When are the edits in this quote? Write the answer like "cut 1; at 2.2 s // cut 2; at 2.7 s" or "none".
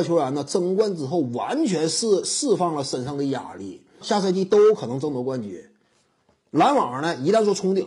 cut 1; at 4.0 s